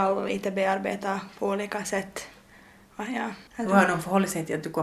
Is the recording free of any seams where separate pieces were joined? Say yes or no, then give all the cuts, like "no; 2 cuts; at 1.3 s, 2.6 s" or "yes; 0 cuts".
no; 1 cut; at 3.5 s